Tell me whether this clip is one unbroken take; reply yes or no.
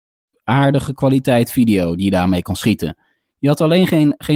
yes